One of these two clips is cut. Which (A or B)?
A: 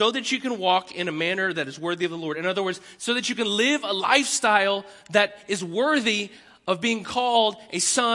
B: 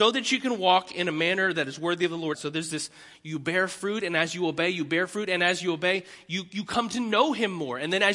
B